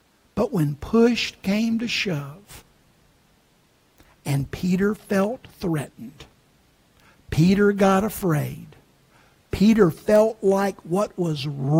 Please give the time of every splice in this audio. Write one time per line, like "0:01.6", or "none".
none